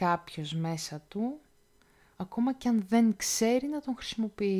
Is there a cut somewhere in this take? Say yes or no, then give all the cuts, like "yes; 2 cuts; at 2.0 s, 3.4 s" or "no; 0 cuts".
yes; 1 cut; at 2.1 s